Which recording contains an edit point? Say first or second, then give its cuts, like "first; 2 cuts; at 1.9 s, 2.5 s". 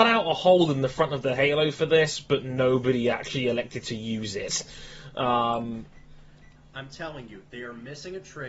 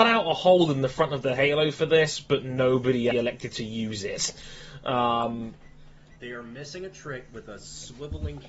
second; 2 cuts; at 3.1 s, 6.2 s